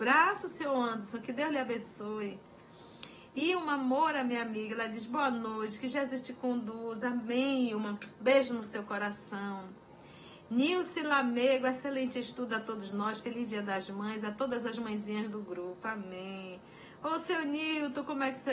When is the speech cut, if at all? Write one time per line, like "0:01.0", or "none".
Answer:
none